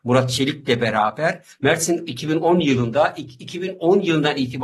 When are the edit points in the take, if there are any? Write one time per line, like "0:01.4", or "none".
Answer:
0:01.5

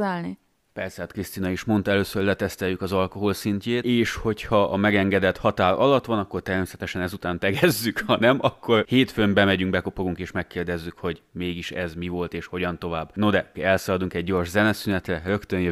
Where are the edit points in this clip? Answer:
0:13.5

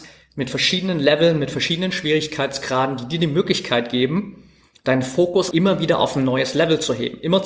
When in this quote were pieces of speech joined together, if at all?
0:05.5

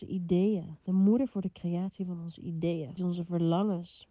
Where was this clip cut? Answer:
0:03.0

